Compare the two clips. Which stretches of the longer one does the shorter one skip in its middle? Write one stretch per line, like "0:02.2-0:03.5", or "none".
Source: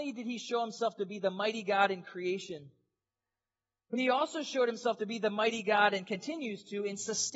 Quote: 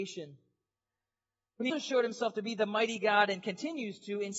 0:04.0-0:04.3